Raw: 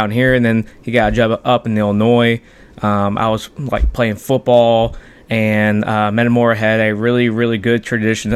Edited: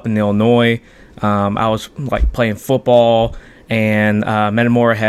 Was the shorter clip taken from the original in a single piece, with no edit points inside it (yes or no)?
yes